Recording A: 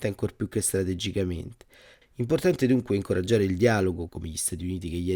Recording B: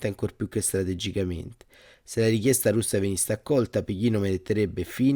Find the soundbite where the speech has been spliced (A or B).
A